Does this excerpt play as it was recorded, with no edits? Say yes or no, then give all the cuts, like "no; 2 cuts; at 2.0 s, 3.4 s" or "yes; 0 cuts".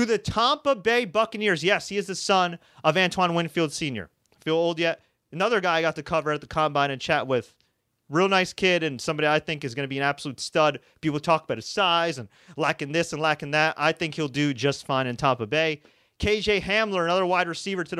yes; 0 cuts